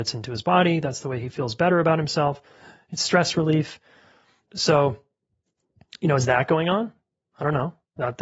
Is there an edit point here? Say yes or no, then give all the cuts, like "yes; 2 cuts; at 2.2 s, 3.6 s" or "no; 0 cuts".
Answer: yes; 1 cut; at 4.4 s